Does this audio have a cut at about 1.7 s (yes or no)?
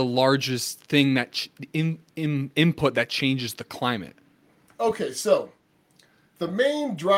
no